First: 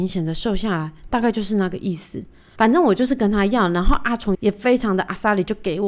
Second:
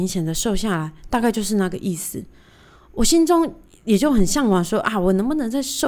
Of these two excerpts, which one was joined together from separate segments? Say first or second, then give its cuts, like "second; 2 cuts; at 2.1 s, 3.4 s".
first; 2 cuts; at 2.6 s, 4.3 s